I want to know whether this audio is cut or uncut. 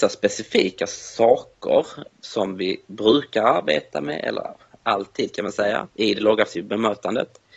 cut